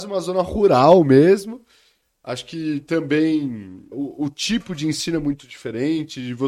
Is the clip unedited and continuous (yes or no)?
no